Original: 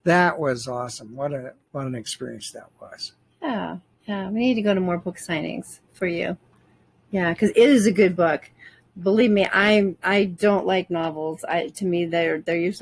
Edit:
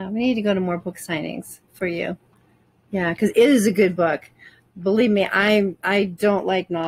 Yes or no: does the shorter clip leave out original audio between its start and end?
no